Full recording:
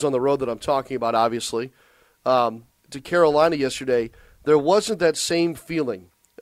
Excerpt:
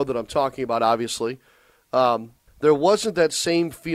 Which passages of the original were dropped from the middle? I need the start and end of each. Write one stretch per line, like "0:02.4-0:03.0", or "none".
0:02.8-0:04.3